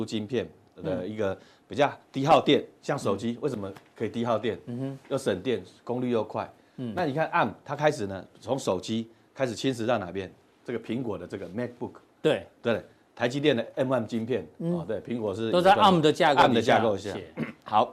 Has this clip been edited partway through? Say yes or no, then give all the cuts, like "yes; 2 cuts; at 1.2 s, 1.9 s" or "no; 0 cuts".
no; 0 cuts